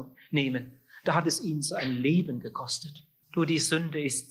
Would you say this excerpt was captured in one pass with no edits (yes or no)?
no